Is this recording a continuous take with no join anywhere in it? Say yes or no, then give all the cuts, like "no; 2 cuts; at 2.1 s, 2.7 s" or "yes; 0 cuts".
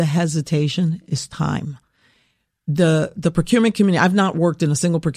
yes; 0 cuts